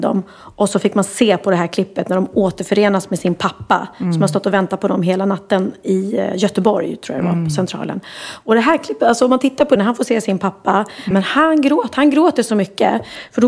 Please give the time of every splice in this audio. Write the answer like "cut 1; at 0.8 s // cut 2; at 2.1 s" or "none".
cut 1; at 9.8 s // cut 2; at 11.1 s